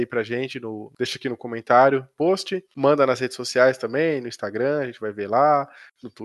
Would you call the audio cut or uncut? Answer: uncut